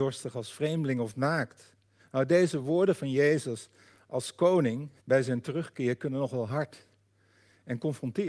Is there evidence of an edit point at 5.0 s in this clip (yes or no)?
yes